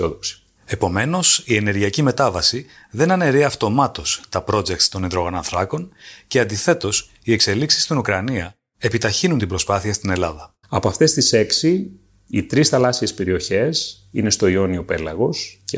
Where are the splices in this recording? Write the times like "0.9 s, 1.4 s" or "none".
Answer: 10.6 s